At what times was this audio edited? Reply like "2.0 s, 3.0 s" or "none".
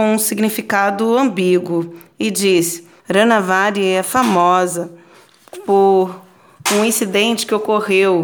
3.0 s